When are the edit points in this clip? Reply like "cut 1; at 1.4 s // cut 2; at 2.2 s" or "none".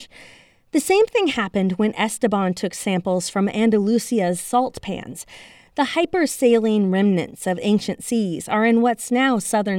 none